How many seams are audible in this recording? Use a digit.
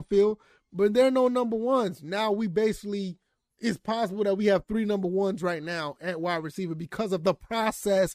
0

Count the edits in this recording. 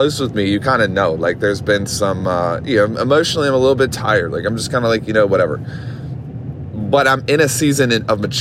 0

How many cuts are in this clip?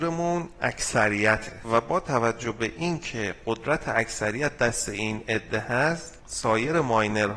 1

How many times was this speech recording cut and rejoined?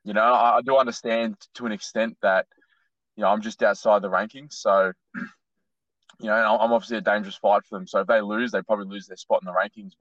0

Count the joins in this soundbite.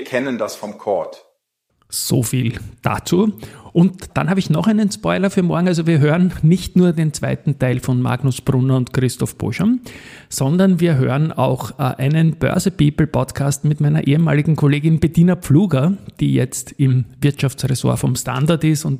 0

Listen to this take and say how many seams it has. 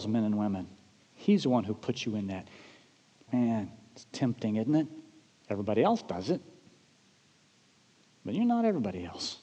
3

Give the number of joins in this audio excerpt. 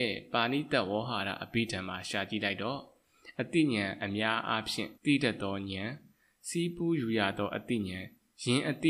1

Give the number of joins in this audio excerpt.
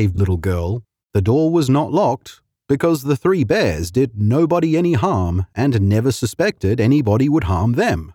1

